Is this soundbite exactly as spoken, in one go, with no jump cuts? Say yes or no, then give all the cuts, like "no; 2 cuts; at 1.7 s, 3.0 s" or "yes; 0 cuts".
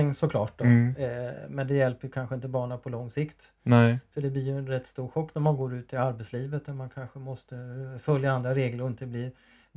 yes; 0 cuts